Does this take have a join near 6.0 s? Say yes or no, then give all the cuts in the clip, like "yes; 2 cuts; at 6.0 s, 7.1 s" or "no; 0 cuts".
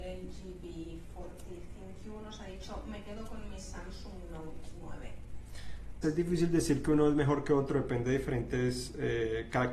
yes; 1 cut; at 6.0 s